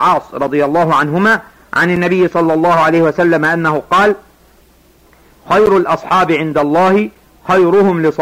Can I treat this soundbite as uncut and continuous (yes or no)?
yes